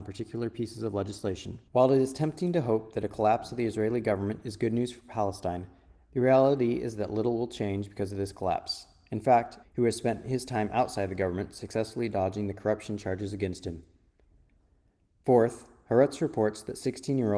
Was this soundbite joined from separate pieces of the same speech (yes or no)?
yes